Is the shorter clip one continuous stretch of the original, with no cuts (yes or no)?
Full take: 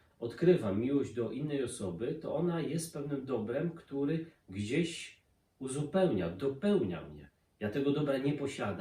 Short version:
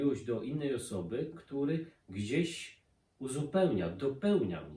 no